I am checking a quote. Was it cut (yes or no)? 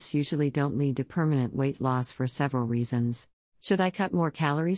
yes